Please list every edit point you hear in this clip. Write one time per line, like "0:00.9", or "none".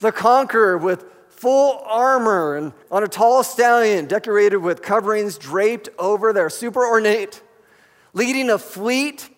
0:02.8